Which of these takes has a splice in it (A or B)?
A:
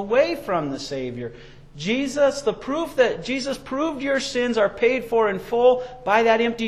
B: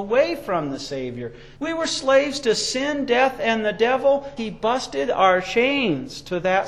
B